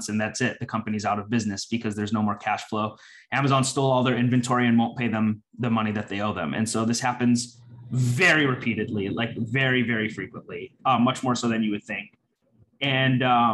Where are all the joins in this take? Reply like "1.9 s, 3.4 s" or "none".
none